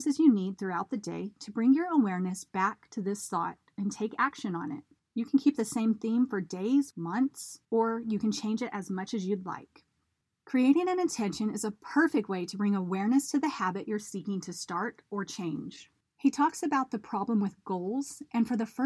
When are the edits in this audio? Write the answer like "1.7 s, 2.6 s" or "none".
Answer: 6.9 s, 16.0 s